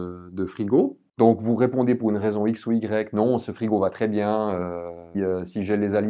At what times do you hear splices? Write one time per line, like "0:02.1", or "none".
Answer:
0:05.1